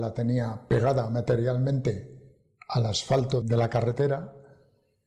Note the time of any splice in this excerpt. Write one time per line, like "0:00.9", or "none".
0:03.4